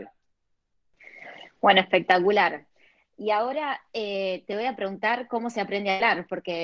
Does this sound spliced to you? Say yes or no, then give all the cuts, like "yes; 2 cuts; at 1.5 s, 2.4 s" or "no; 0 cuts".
no; 0 cuts